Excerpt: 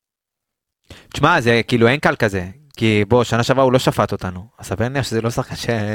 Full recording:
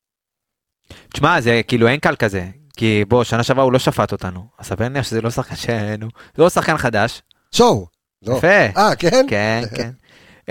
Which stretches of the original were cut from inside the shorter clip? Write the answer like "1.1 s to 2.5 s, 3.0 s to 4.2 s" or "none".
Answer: none